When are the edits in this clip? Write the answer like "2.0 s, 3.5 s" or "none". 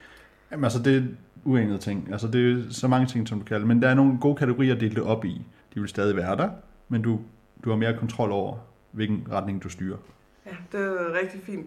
1.4 s, 5.6 s